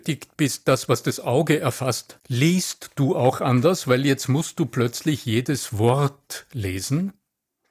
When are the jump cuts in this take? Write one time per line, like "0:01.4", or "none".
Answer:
0:02.2